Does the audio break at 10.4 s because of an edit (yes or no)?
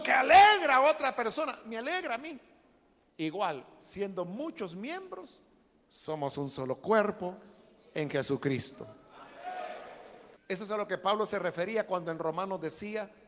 yes